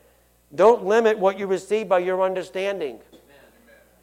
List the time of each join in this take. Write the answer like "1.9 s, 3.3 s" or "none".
3.1 s